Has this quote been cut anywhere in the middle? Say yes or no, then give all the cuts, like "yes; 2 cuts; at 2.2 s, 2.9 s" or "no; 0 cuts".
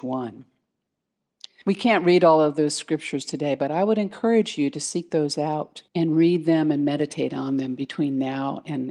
yes; 2 cuts; at 1.6 s, 5.9 s